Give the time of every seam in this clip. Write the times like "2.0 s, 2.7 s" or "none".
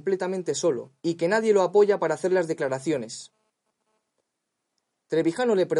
1.0 s